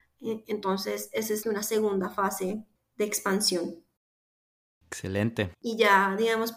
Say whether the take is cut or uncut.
cut